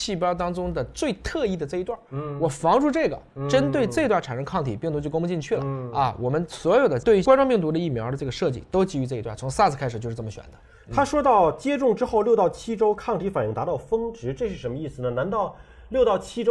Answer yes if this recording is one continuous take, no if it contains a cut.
yes